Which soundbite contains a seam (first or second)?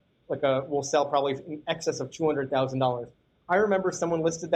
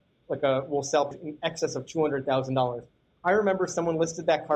second